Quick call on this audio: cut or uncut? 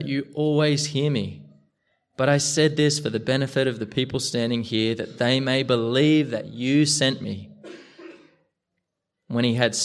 uncut